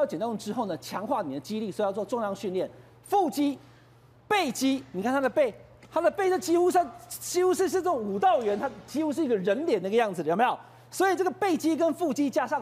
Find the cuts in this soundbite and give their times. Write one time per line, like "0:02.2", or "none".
none